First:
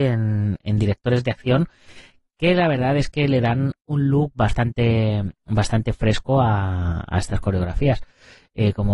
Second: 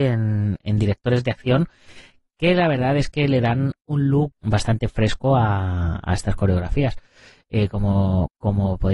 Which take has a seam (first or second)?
second